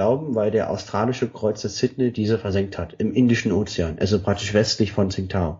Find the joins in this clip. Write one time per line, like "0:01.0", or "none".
none